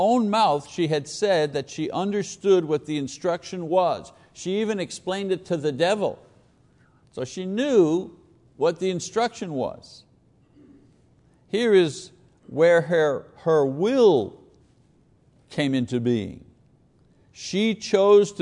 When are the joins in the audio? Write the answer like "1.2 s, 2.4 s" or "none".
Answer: 7.0 s